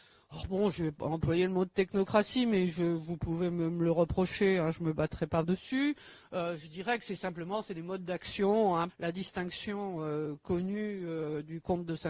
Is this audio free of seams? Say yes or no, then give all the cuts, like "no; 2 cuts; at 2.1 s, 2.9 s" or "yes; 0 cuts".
no; 2 cuts; at 5.4 s, 8.9 s